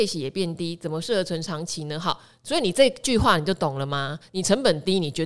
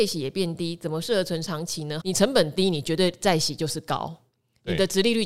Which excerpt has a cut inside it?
second; 1 cut; at 2.0 s

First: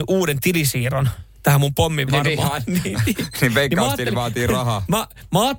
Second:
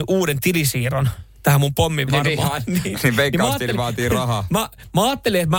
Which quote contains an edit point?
second; 1 cut; at 2.9 s

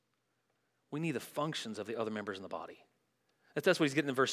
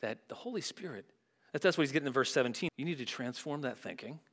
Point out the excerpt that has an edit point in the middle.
second; 2 cuts; at 1.4 s, 2.7 s

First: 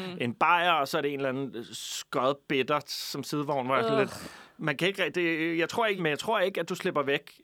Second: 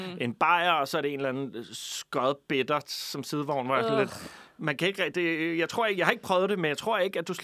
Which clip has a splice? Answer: first; 1 cut; at 6.0 s

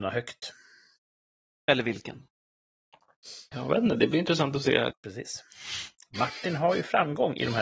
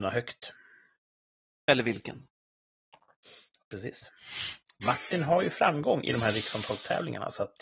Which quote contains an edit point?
first; 2 cuts; at 3.5 s, 4.9 s

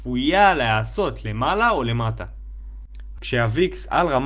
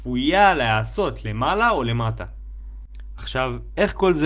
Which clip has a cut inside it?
first; 1 cut; at 3.2 s

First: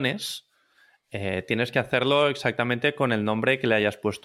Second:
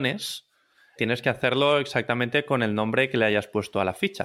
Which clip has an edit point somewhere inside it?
second; 1 cut; at 1.0 s

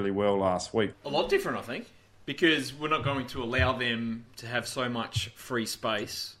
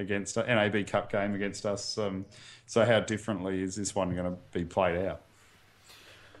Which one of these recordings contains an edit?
first; 1 cut; at 0.9 s

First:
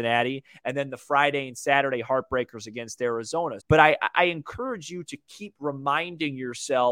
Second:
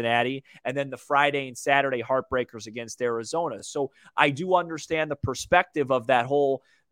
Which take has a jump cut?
first; 1 cut; at 3.6 s

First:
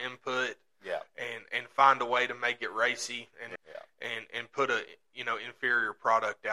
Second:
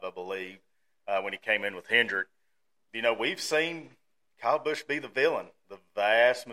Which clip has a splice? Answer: first; 1 cut; at 3.6 s

